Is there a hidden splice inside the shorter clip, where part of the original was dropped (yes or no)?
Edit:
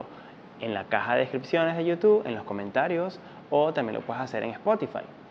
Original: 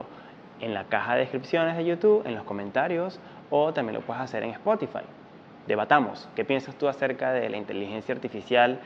no